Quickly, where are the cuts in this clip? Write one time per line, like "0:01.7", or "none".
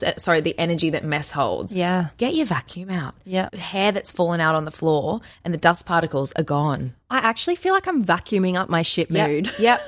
0:03.5